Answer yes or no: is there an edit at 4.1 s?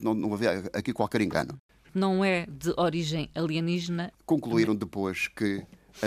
yes